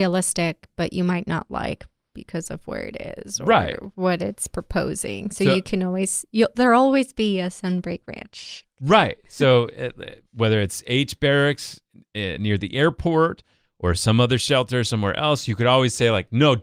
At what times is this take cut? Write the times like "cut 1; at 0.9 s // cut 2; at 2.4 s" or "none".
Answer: none